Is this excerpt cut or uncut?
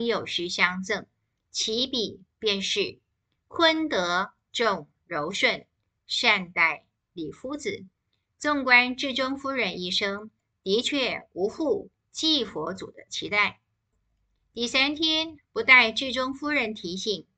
cut